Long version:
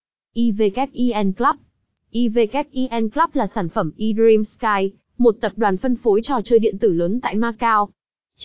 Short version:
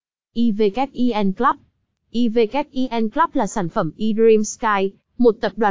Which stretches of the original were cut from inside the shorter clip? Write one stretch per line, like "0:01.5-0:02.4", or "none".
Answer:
none